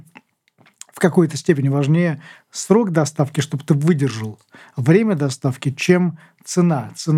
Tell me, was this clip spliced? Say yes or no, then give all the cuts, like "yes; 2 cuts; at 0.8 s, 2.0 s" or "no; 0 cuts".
no; 0 cuts